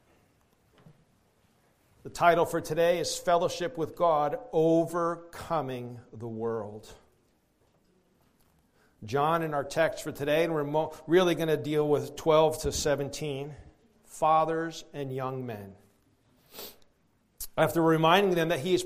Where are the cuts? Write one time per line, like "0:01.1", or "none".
0:14.0